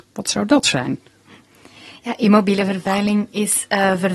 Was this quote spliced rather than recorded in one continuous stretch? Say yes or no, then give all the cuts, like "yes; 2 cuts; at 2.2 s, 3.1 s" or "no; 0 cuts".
no; 0 cuts